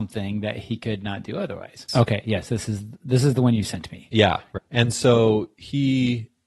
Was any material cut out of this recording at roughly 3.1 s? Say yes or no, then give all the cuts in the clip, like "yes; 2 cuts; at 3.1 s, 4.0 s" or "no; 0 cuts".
no; 2 cuts; at 1.9 s, 4.6 s